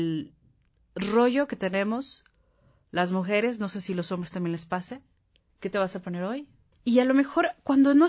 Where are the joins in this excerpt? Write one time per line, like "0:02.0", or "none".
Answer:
0:05.5
0:06.7